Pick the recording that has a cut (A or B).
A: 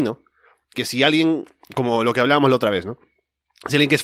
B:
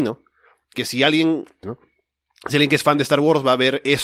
B